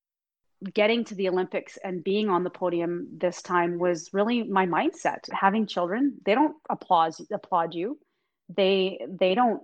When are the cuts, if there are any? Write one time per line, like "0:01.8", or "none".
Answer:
0:05.3